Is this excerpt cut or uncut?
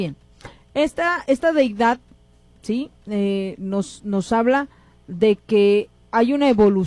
uncut